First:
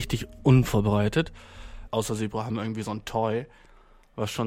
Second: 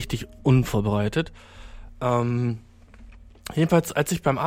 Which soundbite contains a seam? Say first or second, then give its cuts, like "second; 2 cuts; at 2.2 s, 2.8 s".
first; 1 cut; at 1.9 s